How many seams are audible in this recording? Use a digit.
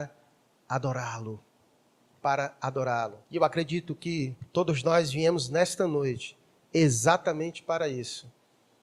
2